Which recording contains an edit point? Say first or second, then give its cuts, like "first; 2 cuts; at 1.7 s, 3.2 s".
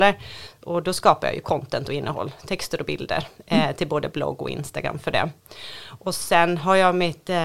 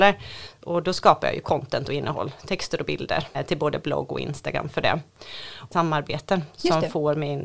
second; 2 cuts; at 3.3 s, 5.7 s